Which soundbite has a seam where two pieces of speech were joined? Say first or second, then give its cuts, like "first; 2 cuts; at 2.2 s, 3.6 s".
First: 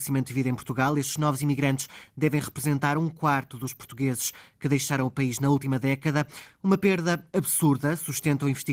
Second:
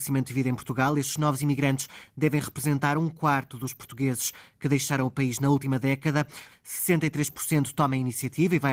second; 1 cut; at 6.5 s